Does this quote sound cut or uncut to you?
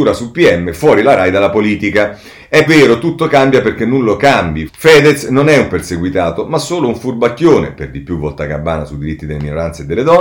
cut